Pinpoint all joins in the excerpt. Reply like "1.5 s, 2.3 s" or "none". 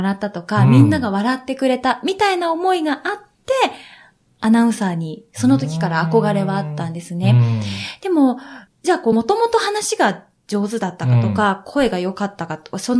none